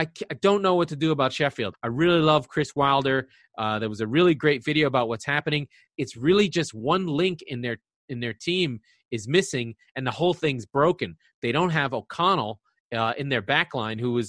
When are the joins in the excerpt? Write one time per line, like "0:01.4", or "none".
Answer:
0:01.7